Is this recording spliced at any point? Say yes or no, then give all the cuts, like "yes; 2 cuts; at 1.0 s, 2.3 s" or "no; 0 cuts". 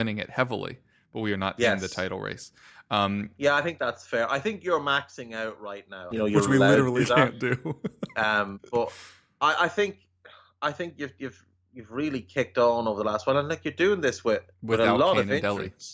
yes; 2 cuts; at 6.1 s, 14.5 s